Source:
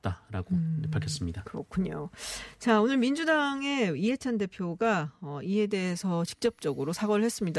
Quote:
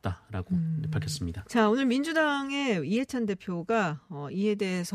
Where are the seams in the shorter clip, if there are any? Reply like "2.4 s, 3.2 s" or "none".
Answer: 1.4 s